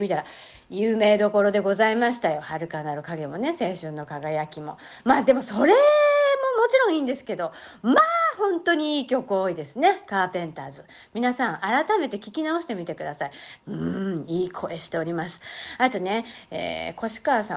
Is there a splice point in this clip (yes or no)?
yes